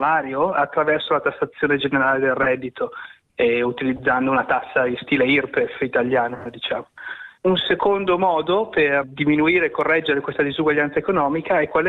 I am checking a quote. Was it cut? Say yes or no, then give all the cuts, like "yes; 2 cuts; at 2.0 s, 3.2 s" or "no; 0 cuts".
yes; 2 cuts; at 7.4 s, 9.0 s